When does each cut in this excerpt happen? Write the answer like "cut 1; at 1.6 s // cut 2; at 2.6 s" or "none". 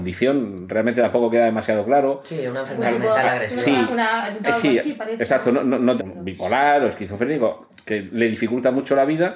cut 1; at 4.4 s // cut 2; at 6.0 s